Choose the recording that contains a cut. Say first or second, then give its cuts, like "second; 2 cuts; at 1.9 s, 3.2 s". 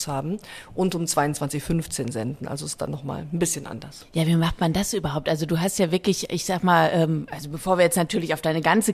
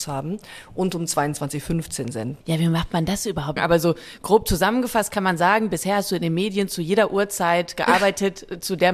second; 2 cuts; at 2.4 s, 3.6 s